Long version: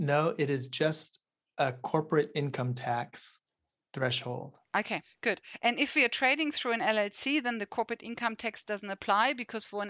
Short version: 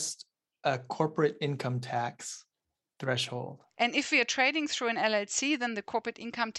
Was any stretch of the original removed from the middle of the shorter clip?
yes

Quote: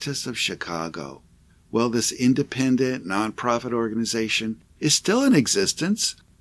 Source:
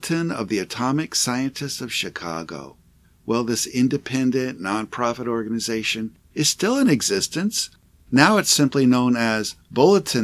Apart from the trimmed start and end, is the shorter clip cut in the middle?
no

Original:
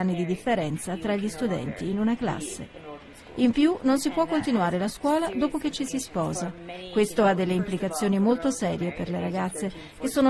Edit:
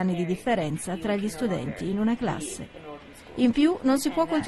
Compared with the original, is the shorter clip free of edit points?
yes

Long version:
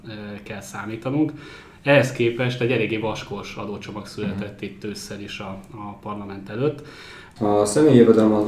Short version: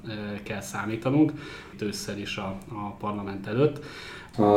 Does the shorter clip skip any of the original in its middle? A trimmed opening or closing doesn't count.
yes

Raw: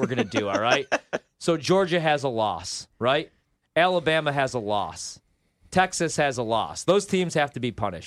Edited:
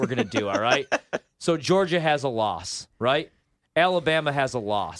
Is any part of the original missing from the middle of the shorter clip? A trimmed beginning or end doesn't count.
no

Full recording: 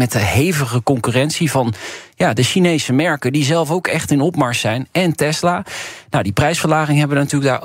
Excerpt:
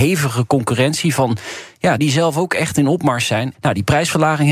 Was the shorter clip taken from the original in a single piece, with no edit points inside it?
no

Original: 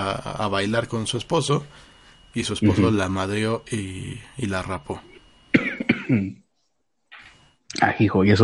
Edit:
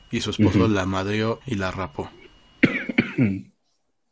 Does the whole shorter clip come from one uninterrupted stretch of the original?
no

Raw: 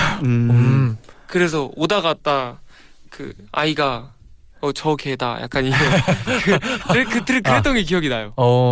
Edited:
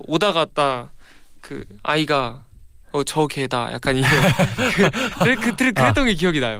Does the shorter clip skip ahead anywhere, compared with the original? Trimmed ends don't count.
no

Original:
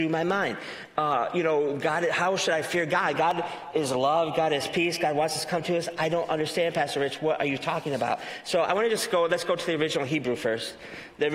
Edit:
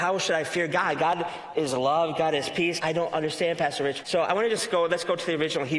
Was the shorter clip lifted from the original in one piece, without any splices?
no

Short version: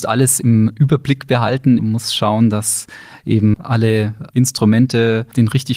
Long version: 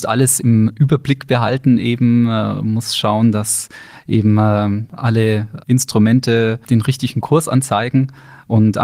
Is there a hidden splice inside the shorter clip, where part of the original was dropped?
yes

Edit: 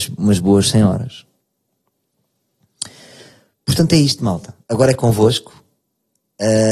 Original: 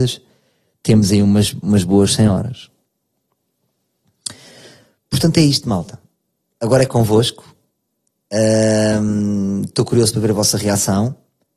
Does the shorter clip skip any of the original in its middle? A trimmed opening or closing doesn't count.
yes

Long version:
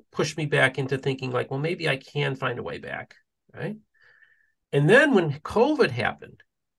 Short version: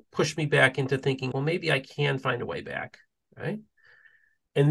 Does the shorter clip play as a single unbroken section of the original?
no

